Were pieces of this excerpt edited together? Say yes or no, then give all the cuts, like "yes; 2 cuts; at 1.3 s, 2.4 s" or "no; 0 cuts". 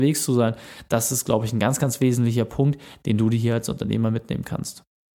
no; 0 cuts